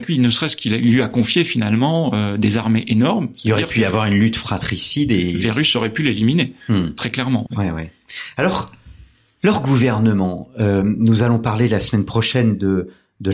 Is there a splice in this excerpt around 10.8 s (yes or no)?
no